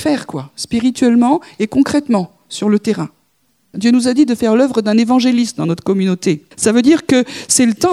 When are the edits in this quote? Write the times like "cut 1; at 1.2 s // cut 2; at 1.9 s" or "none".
cut 1; at 3.7 s // cut 2; at 6.5 s